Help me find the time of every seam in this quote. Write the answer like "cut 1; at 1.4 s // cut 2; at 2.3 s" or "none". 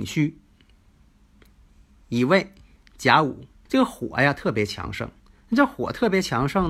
cut 1; at 3.7 s

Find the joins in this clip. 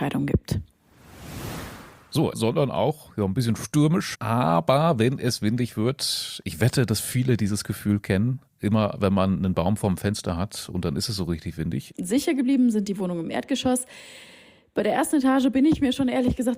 cut 1; at 2.3 s // cut 2; at 4.1 s // cut 3; at 11.9 s

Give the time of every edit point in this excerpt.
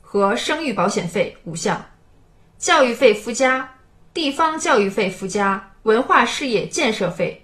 cut 1; at 5.8 s

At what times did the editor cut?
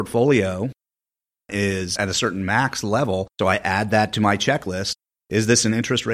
cut 1; at 3.4 s

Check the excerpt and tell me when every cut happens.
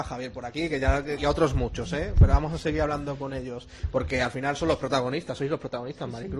cut 1; at 1.2 s

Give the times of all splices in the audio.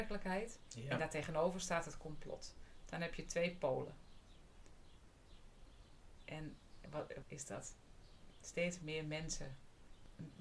cut 1; at 7.2 s

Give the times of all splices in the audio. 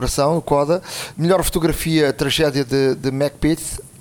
cut 1; at 1.1 s

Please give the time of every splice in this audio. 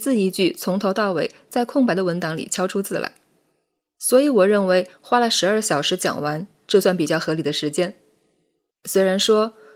cut 1; at 8.7 s

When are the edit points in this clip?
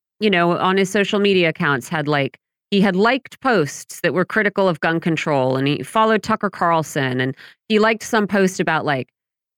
none

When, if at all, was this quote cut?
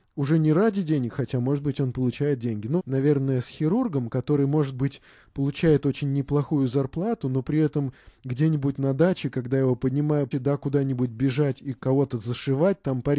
cut 1; at 2.8 s // cut 2; at 10.3 s

